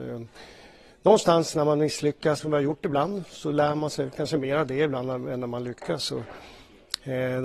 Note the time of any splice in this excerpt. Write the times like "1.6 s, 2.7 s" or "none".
2.4 s